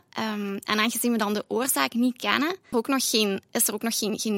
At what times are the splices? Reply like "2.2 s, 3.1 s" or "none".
2.7 s